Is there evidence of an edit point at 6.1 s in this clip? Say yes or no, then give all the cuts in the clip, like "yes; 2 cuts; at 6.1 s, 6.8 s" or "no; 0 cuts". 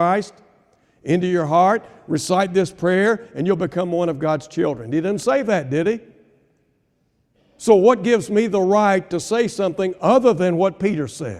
no; 0 cuts